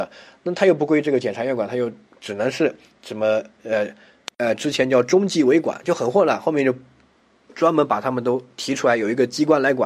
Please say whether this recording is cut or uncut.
uncut